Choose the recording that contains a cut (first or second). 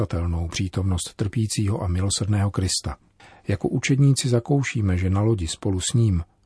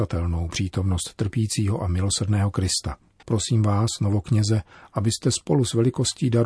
second